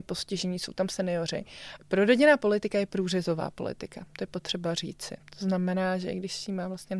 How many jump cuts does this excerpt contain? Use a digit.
1